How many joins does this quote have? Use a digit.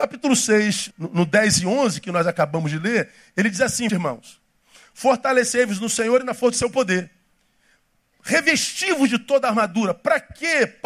2